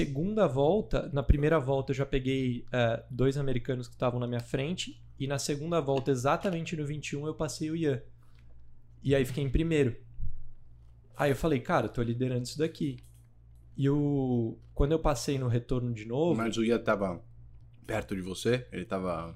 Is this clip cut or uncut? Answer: uncut